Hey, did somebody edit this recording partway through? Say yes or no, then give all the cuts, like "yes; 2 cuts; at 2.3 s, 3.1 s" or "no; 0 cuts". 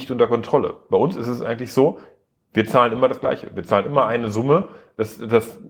no; 0 cuts